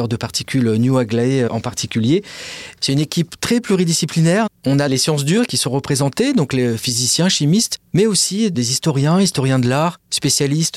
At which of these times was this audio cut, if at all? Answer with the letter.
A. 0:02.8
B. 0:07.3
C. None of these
A